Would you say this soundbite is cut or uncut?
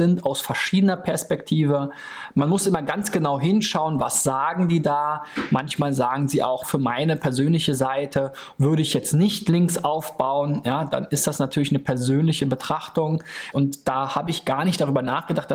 cut